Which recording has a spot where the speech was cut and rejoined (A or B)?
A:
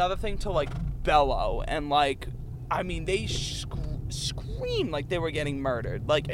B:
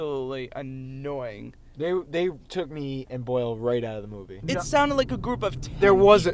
B